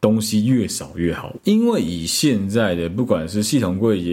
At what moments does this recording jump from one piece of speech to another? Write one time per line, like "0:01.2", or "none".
0:01.4